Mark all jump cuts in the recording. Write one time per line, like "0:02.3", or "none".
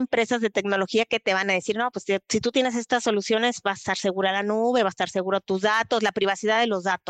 none